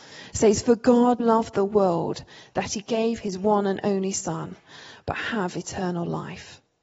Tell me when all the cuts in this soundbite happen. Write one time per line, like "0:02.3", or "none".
0:01.2
0:04.9